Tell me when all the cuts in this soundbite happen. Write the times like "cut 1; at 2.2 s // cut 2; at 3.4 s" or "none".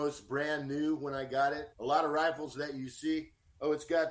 cut 1; at 1.7 s